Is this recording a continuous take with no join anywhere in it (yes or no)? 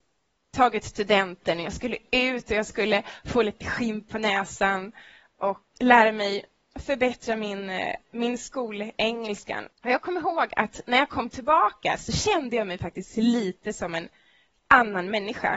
no